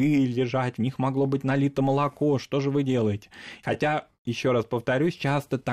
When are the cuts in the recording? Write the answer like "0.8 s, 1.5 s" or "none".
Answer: 3.6 s